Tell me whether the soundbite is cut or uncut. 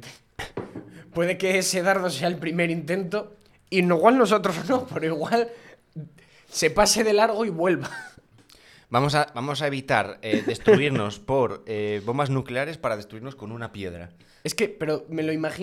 uncut